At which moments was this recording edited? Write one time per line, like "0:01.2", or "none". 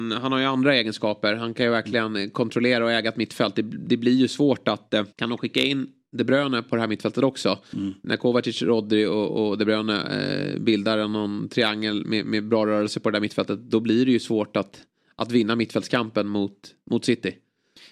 0:05.1